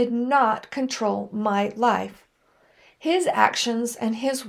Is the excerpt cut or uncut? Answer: uncut